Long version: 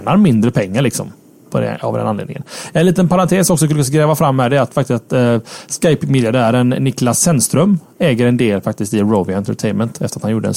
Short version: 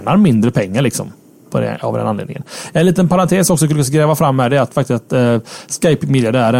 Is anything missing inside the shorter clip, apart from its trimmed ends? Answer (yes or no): no